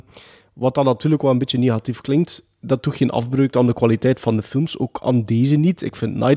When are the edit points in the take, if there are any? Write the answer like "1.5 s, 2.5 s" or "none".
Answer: none

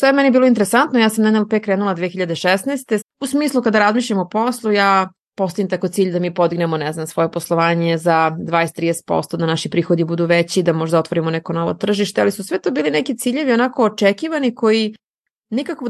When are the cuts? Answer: 3.0 s

